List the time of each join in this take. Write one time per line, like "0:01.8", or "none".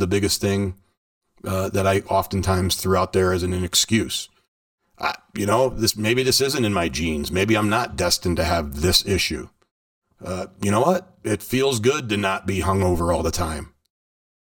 none